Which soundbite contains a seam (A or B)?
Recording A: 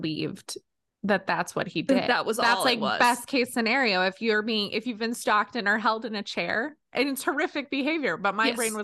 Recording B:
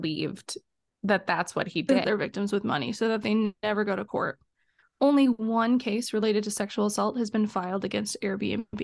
B